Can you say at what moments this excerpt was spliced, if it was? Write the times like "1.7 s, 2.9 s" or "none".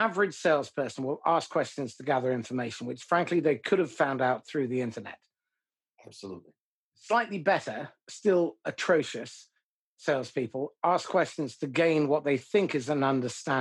none